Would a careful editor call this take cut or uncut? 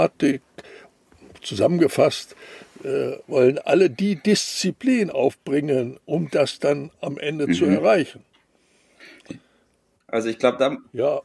cut